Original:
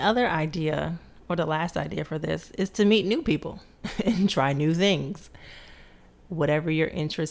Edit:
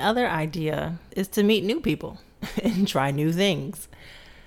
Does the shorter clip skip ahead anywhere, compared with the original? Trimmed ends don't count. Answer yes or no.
yes